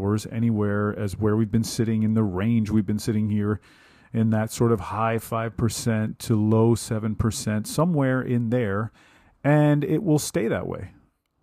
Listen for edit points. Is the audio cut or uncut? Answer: uncut